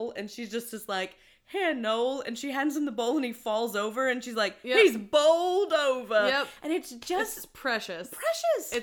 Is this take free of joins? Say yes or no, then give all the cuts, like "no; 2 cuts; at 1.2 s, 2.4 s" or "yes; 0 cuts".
yes; 0 cuts